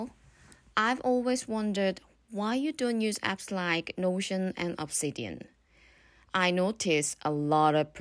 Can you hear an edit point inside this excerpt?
no; 0 cuts

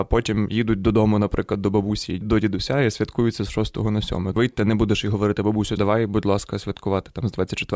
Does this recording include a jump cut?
yes; 2 cuts; at 4.4 s, 5.8 s

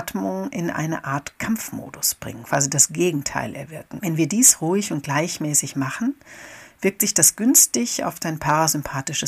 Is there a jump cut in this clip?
yes; 2 cuts; at 2.4 s, 4.0 s

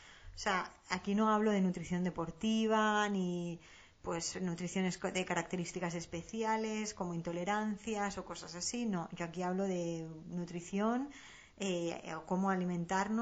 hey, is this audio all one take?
yes; 0 cuts

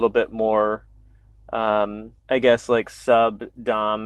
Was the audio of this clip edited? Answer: yes; 1 cut; at 2.2 s

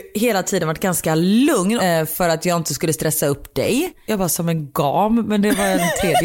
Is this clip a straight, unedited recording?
no; 2 cuts; at 1.8 s, 4.1 s

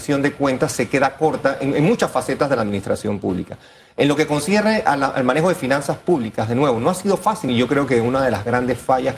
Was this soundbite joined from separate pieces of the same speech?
yes; 1 cut; at 7.5 s

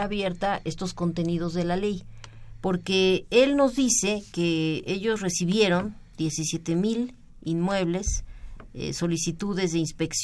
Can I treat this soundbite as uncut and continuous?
yes; 0 cuts

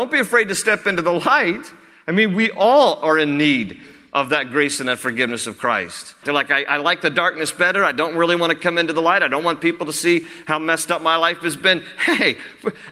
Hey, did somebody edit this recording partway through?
yes; 1 cut; at 6.2 s

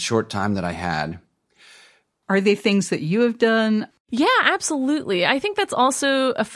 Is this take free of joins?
no; 2 cuts; at 2.2 s, 3.9 s

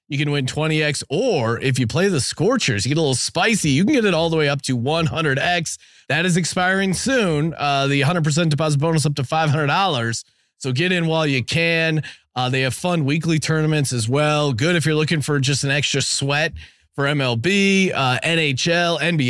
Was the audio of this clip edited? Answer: yes; 1 cut; at 6.0 s

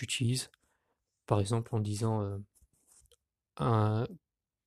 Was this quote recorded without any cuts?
yes; 0 cuts

